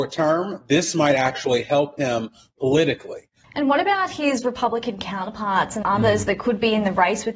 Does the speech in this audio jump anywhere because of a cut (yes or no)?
yes